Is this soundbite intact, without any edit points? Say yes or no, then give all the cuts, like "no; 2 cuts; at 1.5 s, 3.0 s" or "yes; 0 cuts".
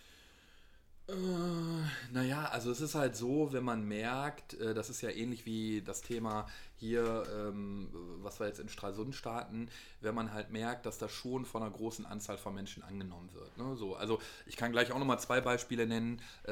yes; 0 cuts